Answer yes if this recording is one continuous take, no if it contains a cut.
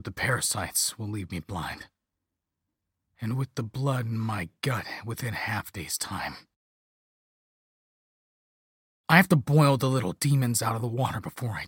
no